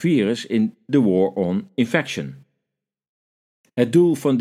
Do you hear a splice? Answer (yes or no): no